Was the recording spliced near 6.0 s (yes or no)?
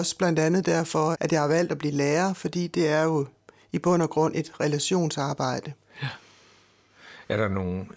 no